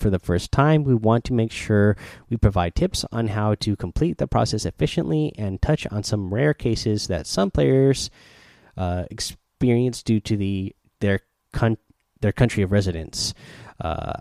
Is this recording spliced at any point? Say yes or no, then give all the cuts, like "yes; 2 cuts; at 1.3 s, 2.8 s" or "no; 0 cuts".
no; 0 cuts